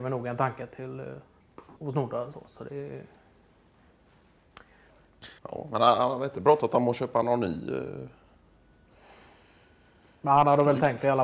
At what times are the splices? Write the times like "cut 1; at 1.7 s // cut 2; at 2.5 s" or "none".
cut 1; at 1.8 s // cut 2; at 5.4 s

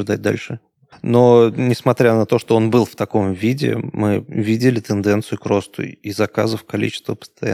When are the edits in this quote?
cut 1; at 0.9 s

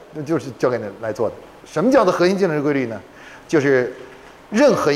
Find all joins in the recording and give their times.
cut 1; at 1.6 s

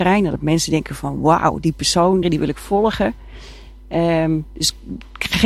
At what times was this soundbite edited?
cut 1; at 2.2 s

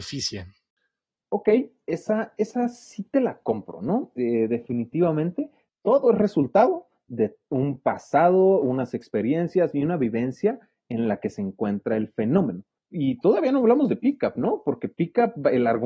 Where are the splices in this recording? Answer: none

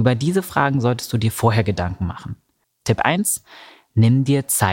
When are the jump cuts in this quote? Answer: cut 1; at 2.6 s

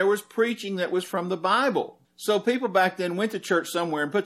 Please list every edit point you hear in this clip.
cut 1; at 2.0 s

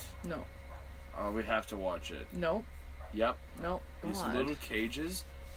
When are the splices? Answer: cut 1; at 4.0 s

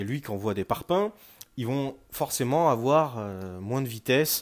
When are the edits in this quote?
none

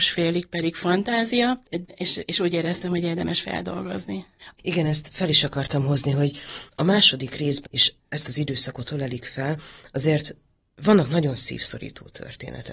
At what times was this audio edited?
cut 1; at 1.8 s // cut 2; at 4.5 s // cut 3; at 7.7 s

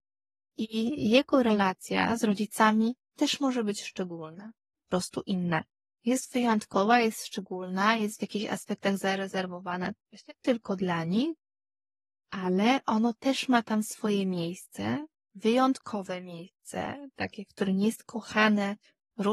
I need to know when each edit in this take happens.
cut 1; at 5.9 s

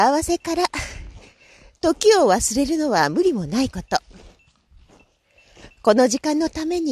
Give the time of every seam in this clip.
none

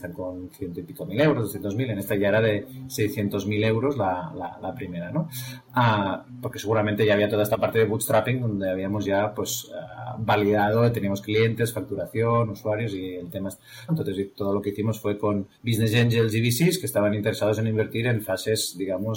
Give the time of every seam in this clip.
cut 1; at 13.9 s // cut 2; at 15.5 s

